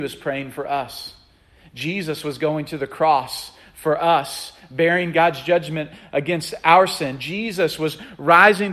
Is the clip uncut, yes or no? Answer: yes